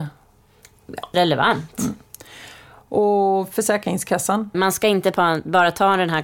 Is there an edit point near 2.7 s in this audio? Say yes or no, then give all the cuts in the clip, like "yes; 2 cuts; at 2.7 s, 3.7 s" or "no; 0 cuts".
no; 2 cuts; at 1.1 s, 4.5 s